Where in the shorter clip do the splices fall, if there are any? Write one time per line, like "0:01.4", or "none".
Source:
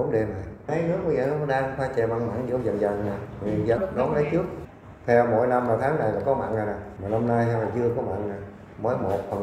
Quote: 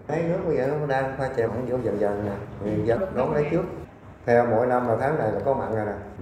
0:01.5